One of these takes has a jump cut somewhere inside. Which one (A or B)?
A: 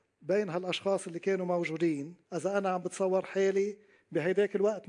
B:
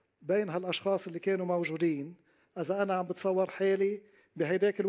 A